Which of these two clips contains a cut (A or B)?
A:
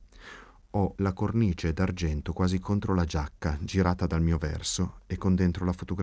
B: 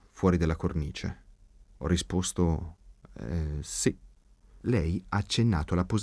B